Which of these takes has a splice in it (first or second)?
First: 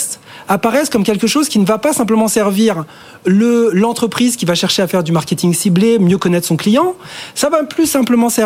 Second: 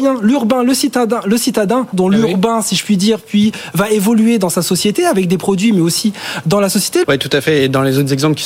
second